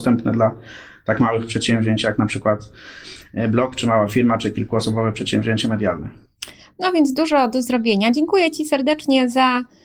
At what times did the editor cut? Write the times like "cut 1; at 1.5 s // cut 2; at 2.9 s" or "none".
none